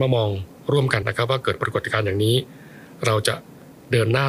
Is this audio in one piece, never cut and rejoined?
no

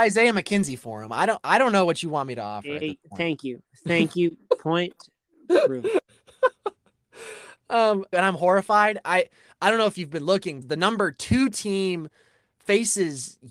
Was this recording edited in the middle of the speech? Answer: yes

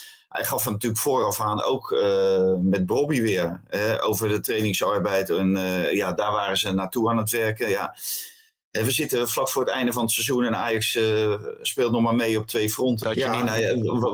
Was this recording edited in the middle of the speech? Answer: yes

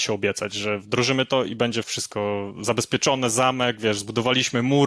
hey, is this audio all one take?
no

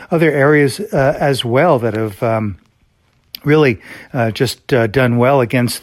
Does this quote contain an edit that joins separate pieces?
no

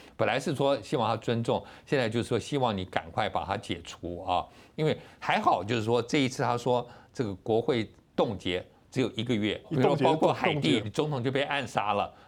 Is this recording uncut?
no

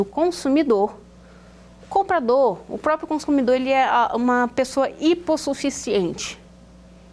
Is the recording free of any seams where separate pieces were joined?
no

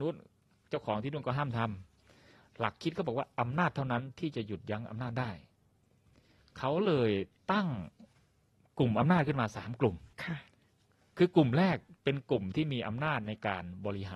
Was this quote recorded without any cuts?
no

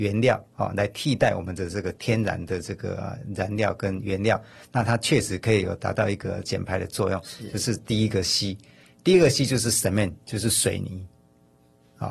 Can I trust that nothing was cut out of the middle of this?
yes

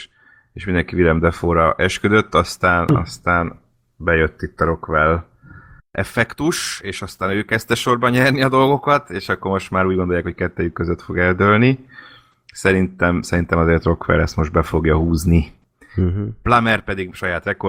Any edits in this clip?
no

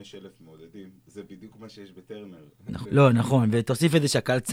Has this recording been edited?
yes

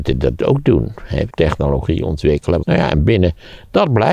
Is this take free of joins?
no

